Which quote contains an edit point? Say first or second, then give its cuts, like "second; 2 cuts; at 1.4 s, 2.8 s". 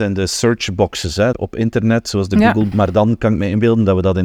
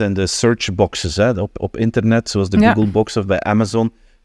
first; 2 cuts; at 1.3 s, 2.7 s